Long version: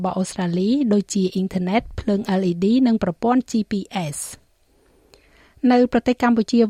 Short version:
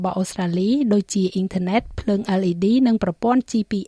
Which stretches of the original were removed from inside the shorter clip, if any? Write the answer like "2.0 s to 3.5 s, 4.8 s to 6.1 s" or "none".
none